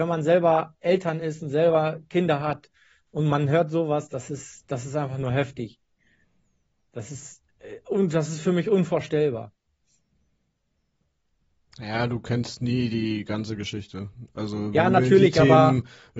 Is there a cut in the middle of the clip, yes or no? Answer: no